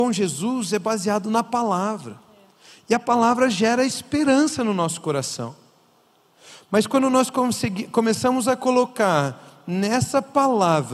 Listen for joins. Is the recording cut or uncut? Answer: uncut